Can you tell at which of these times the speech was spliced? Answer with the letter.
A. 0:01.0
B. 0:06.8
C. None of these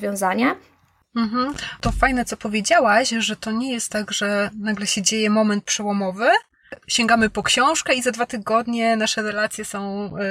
A